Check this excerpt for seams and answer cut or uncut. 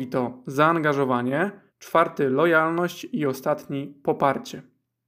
cut